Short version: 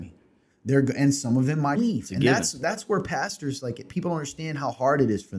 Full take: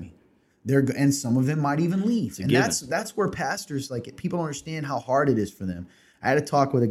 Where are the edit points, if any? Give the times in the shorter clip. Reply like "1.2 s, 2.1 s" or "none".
1.8 s

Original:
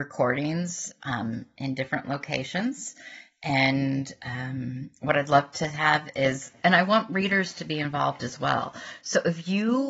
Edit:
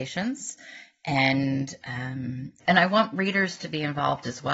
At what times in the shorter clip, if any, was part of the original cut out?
2.6 s

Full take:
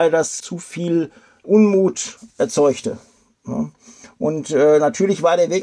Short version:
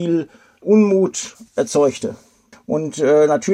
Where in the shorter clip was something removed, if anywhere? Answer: 2.5 s

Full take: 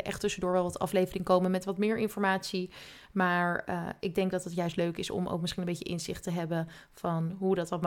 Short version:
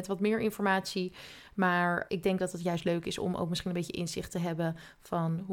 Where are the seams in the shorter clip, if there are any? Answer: 2.1 s

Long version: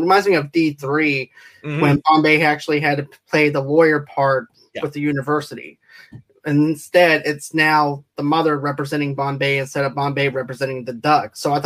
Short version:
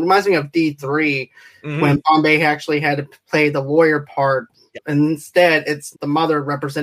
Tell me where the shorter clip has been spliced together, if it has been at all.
4.7 s, 5.9 s

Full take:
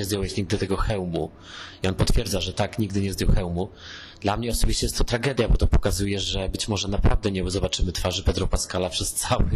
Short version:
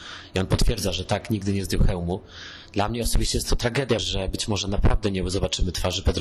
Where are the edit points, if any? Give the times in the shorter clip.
4.0 s

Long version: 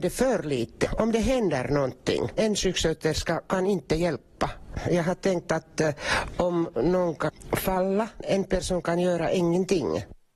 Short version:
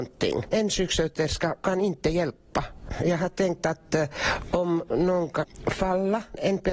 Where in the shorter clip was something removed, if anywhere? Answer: none

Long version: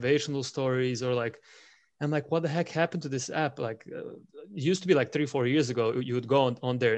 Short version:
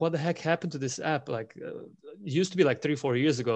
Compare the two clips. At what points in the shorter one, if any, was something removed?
none

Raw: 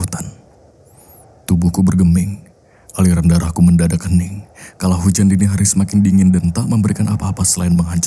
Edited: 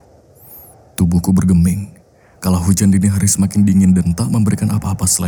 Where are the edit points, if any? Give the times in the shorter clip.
2.4 s

